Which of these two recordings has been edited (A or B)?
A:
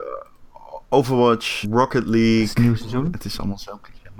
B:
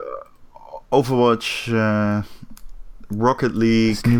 A